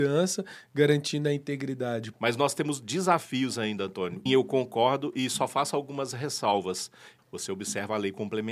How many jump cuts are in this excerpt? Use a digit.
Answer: 3